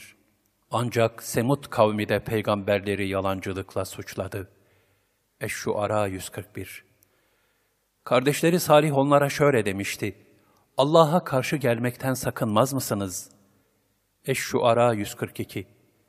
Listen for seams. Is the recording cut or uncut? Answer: uncut